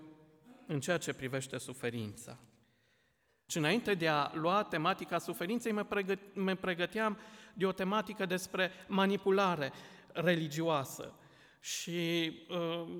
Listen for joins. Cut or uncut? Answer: cut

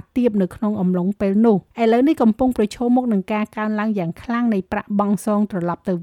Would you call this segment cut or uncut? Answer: cut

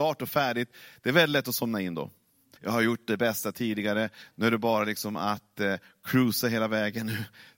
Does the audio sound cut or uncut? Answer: cut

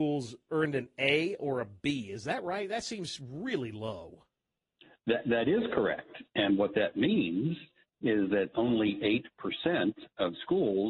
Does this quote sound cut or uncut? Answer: uncut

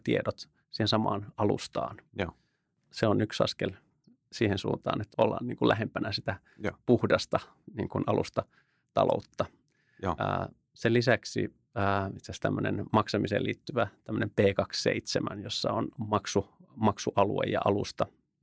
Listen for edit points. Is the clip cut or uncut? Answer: cut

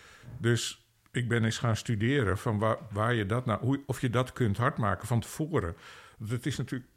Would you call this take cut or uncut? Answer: uncut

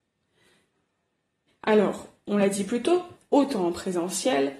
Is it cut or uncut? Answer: cut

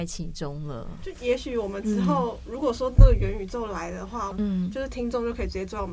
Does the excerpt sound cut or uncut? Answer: cut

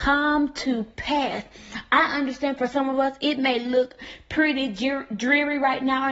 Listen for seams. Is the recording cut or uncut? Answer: uncut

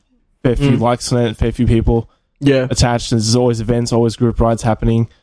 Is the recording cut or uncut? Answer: uncut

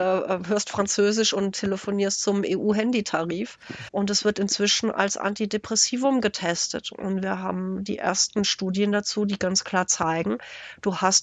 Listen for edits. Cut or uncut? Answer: cut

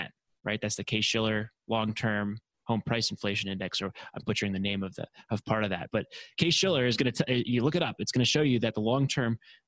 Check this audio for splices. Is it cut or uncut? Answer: cut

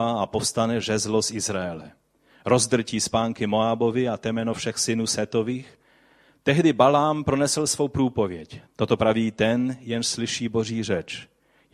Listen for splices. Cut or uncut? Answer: cut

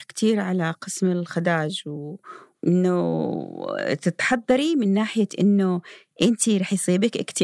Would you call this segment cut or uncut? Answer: cut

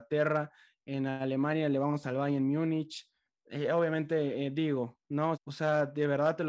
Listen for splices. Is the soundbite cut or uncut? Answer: cut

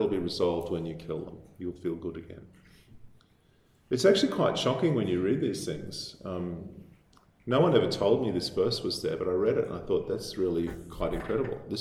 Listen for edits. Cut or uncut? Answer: uncut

